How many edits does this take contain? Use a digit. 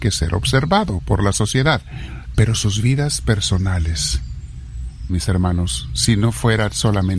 2